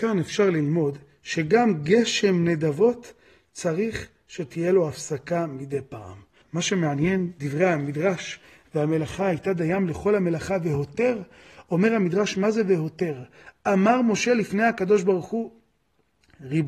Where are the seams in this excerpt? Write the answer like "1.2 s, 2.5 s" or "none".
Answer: 6.4 s